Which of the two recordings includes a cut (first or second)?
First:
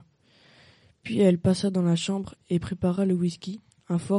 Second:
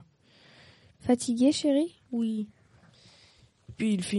second